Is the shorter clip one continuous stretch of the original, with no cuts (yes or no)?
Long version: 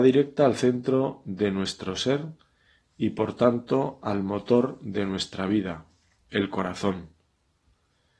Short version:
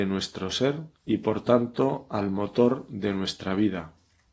no